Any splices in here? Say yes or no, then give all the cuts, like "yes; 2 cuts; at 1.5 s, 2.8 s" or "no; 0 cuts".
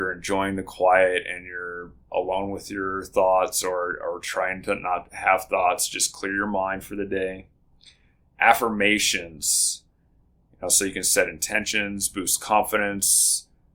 no; 0 cuts